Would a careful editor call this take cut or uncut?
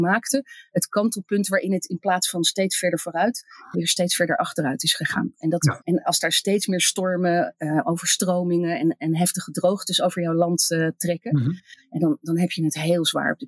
cut